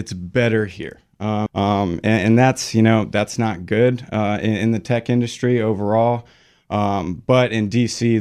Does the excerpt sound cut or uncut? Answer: cut